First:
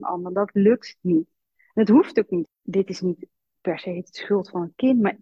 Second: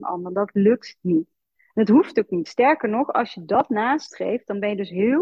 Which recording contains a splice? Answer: first; 1 cut; at 2.5 s

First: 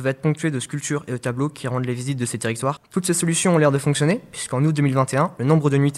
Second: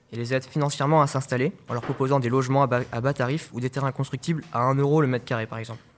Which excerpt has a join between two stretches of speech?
first; 1 cut; at 2.8 s

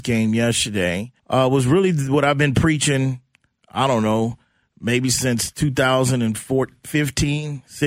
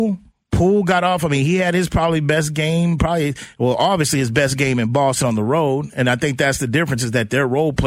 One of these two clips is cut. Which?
first; 1 cut; at 1.2 s

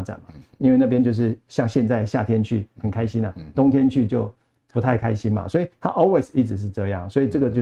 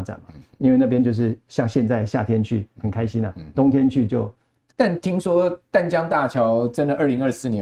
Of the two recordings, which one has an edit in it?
second; 1 cut; at 4.7 s

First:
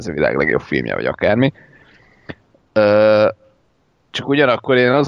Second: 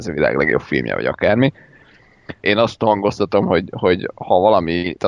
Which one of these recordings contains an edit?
second; 1 cut; at 2.4 s

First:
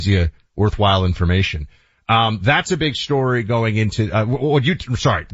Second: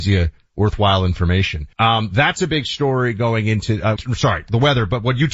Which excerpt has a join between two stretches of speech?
second; 2 cuts; at 1.7 s, 4.0 s

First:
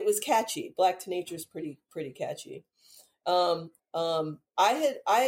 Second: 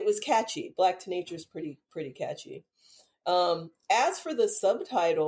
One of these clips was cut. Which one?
first; 1 cut; at 3.8 s

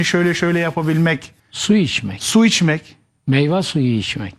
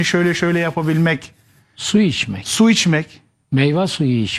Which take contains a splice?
first; 1 cut; at 1.4 s

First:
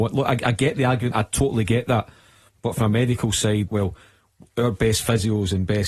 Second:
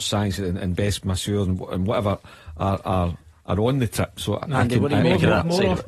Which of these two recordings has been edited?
first; 2 cuts; at 1.1 s, 3.7 s

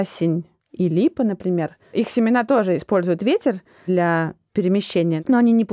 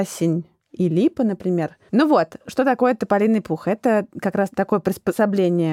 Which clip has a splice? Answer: second; 1 cut; at 1.9 s

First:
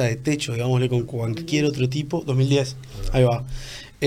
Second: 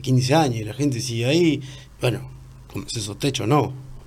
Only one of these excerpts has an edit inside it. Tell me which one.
second; 1 cut; at 1.9 s

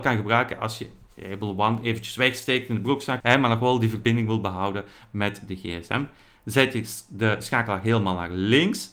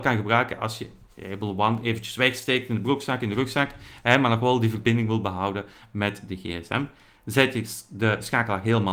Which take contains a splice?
first; 1 cut; at 3.2 s

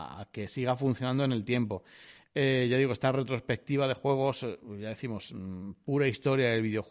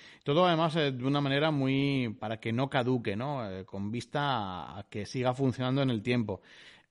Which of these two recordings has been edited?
second; 1 cut; at 2.2 s

